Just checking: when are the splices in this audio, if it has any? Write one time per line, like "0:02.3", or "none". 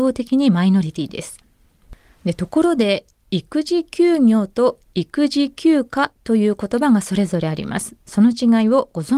none

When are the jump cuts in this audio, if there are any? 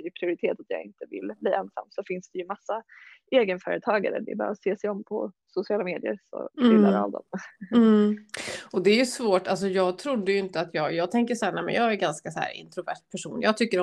none

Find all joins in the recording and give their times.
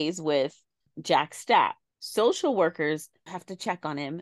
0:03.3

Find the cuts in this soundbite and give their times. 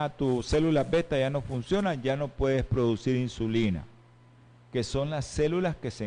none

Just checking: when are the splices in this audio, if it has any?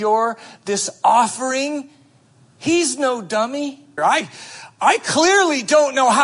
0:04.0

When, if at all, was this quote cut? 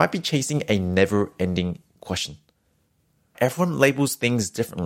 0:03.3

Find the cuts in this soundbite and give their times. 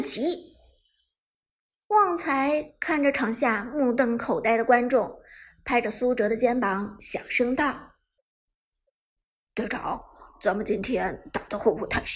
none

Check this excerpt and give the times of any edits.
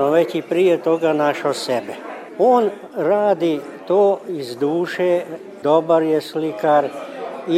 0:05.6

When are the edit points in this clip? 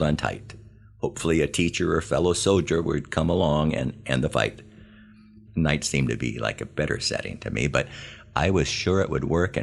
0:05.5

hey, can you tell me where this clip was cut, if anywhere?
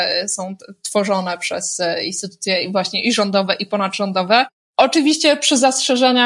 none

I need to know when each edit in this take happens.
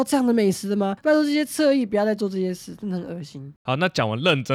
0:01.0

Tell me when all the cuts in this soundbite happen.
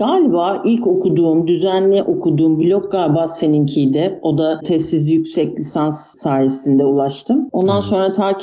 none

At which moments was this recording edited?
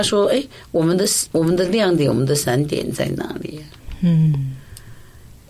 none

